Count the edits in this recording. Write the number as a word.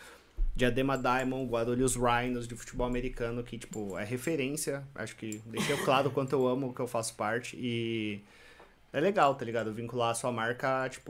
zero